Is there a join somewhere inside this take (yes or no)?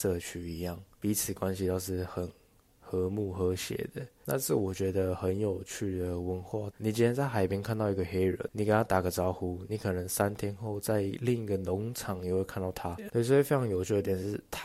yes